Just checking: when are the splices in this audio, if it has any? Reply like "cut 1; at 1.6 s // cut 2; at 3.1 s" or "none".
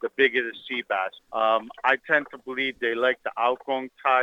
cut 1; at 1.2 s